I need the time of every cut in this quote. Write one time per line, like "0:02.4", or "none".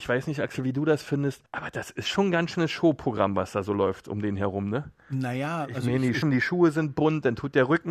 0:01.5
0:06.2